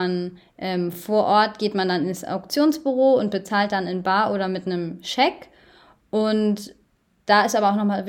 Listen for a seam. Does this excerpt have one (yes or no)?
no